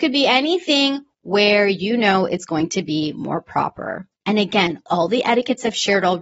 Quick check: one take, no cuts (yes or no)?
no